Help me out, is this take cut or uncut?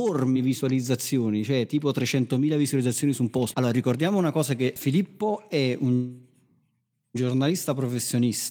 cut